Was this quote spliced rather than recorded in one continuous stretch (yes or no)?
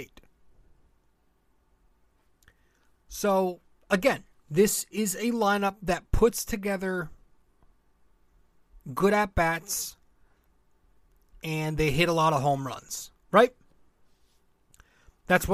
no